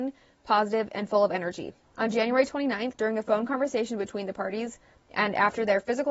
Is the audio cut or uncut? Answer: cut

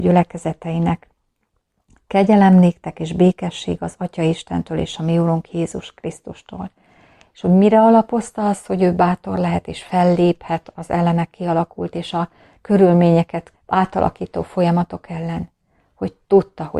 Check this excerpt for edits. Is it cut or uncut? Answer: uncut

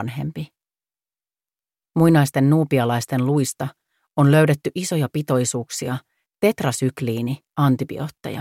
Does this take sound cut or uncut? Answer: uncut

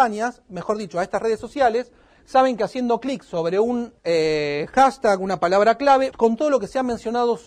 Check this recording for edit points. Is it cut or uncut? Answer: cut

